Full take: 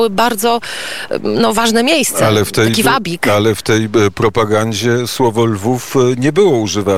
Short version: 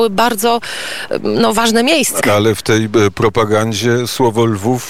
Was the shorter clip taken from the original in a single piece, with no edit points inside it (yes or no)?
no